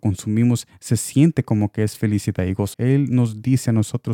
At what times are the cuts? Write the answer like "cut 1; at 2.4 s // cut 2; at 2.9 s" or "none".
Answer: cut 1; at 2.7 s